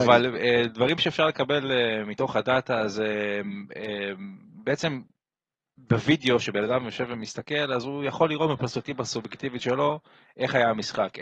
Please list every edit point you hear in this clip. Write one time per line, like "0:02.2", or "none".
none